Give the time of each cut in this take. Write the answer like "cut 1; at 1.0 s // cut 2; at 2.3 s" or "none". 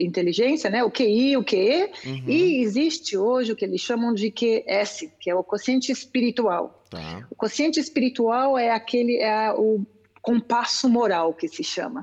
none